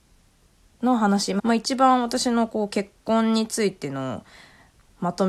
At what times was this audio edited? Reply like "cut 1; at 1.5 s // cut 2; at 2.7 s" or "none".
cut 1; at 1.4 s